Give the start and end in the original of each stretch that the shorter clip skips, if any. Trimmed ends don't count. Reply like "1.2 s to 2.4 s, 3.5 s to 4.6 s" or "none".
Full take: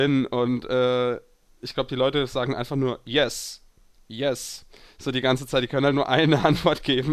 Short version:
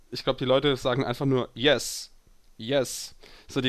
none